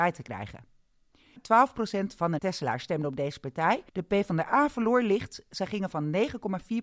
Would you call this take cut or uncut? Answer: cut